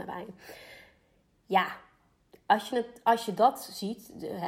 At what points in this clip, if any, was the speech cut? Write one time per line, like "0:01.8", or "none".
none